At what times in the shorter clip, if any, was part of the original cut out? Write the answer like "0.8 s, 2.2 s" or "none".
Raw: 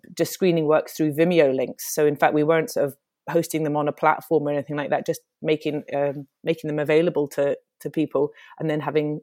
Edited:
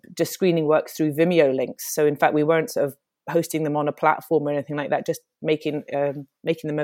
none